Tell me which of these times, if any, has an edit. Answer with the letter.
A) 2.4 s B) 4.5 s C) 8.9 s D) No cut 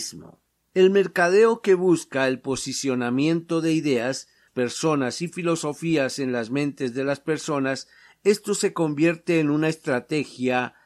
B